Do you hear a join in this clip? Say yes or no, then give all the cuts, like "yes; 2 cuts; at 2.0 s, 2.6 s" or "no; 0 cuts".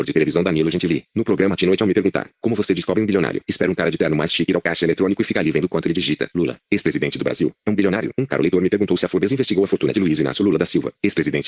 no; 0 cuts